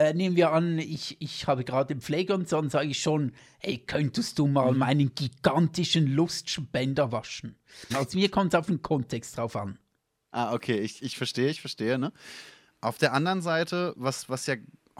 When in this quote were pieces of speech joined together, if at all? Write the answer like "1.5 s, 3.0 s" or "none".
7.9 s, 12.7 s